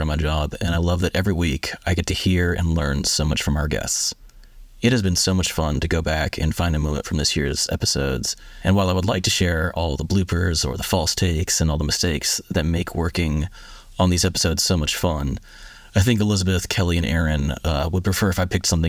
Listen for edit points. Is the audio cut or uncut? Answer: uncut